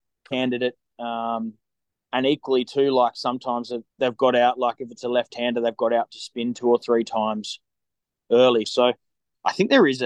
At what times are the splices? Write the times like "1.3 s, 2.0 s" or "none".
3.9 s, 8.6 s